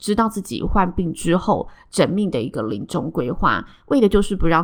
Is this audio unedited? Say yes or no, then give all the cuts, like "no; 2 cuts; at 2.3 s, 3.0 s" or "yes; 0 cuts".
yes; 0 cuts